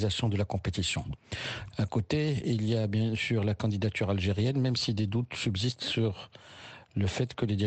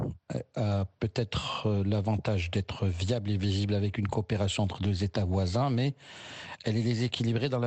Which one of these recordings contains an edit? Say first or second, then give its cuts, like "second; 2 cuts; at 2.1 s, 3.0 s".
first; 1 cut; at 1.7 s